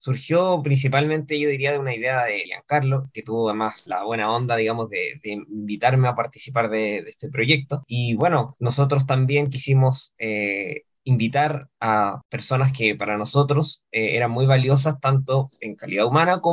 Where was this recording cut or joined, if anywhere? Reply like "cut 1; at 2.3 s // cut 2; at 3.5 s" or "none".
none